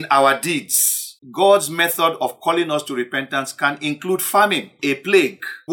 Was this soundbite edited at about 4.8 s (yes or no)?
no